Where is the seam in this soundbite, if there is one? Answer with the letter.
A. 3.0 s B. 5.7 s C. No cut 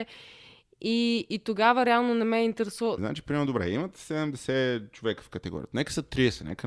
A